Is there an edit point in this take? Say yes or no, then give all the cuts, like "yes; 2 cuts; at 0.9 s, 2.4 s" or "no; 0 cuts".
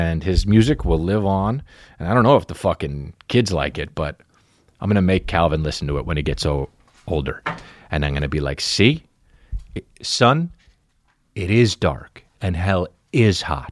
no; 0 cuts